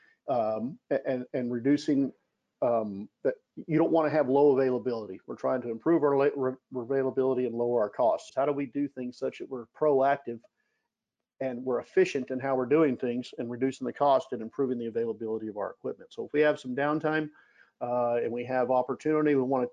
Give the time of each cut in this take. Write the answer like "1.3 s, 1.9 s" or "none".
8.3 s